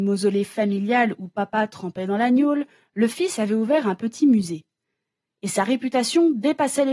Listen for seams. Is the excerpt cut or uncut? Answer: uncut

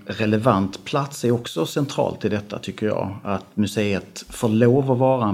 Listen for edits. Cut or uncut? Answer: uncut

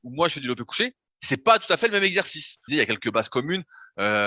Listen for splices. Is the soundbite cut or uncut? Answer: cut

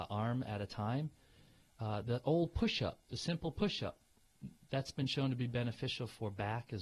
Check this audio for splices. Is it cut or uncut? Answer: uncut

